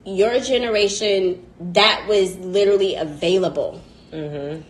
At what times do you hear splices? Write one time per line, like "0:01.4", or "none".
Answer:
0:01.5